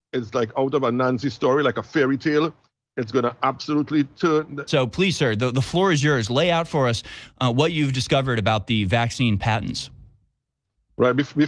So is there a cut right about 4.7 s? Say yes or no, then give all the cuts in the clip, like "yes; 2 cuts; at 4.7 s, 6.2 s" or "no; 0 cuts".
yes; 1 cut; at 4.7 s